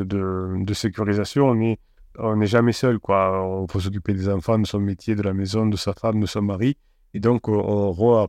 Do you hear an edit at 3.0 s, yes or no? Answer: no